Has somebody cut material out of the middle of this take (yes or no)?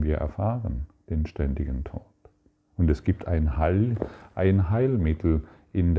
yes